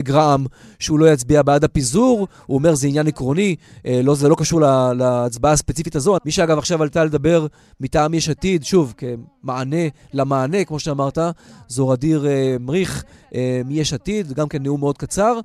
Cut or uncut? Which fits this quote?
cut